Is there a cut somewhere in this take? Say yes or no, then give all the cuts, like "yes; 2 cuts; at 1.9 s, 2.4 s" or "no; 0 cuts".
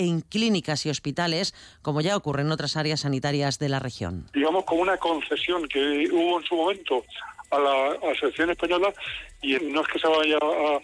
yes; 1 cut; at 9.6 s